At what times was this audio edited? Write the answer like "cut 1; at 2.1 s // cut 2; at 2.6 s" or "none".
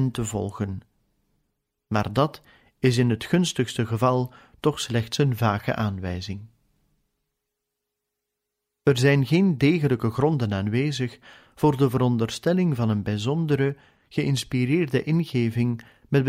none

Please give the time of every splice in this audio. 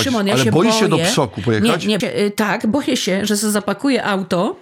cut 1; at 2.0 s

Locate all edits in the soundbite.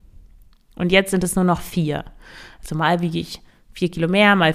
none

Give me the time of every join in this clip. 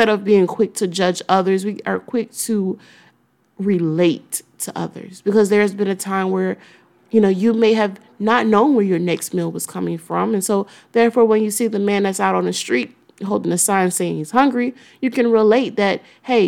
none

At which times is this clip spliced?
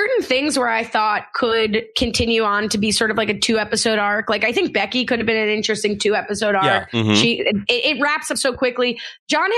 none

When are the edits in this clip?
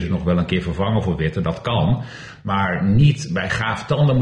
none

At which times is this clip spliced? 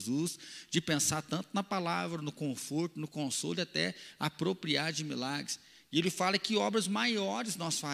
none

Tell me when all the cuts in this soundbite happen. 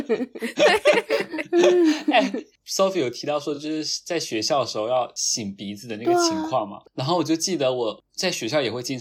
none

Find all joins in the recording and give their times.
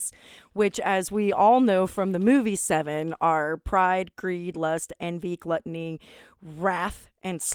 none

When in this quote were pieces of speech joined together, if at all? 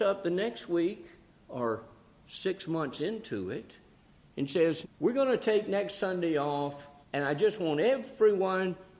cut 1; at 4.8 s // cut 2; at 7.0 s

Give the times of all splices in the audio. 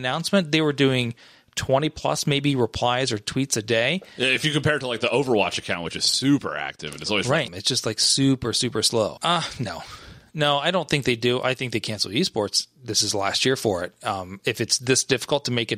cut 1; at 7.5 s // cut 2; at 9.2 s

